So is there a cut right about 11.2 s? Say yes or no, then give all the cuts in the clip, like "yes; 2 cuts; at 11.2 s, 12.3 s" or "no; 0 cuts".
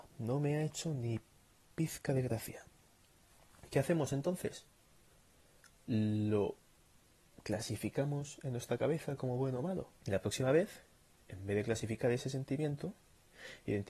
no; 1 cut; at 10.0 s